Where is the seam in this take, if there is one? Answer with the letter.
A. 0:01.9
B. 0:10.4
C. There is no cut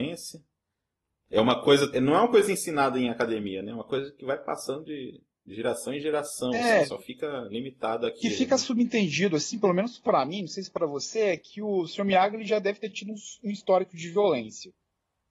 A